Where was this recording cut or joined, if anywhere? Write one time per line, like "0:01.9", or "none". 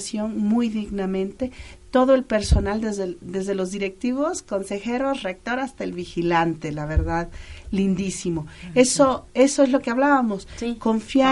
none